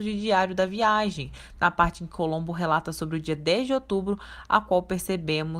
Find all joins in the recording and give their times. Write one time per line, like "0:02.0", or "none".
none